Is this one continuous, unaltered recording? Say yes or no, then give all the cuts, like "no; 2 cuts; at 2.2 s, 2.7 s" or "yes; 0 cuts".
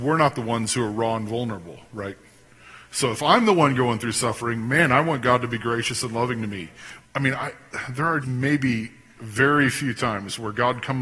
no; 2 cuts; at 7.0 s, 8.2 s